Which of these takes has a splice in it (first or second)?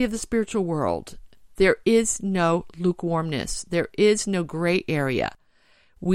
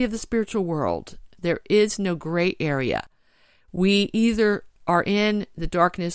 second